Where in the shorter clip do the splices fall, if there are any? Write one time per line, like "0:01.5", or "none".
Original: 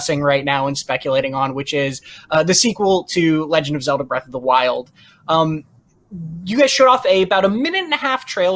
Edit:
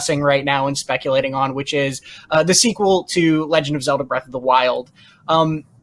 none